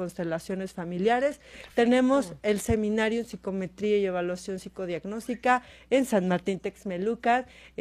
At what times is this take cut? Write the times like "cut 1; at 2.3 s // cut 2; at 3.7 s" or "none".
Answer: none